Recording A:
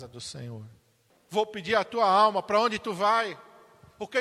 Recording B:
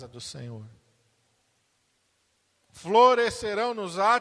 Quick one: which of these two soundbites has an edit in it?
A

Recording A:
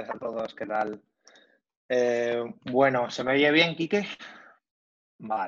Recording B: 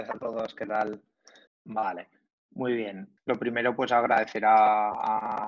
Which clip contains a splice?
B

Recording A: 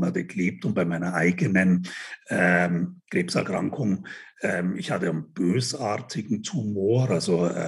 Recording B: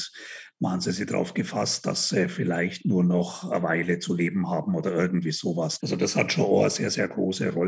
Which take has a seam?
B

